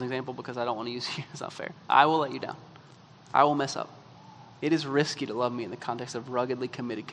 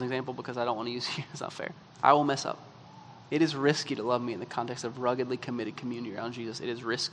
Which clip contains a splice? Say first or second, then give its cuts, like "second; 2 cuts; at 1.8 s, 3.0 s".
second; 1 cut; at 1.8 s